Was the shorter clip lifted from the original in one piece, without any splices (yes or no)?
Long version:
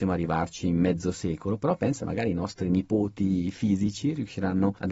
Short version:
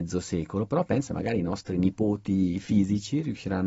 yes